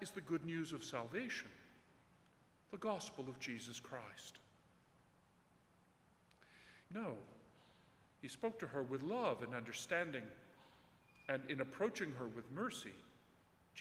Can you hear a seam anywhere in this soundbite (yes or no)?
yes